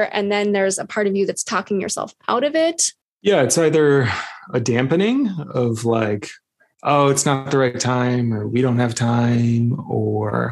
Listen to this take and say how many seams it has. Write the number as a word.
one